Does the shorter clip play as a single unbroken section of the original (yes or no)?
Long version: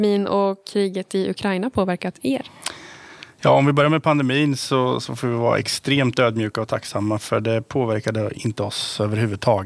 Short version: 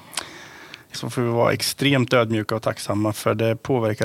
no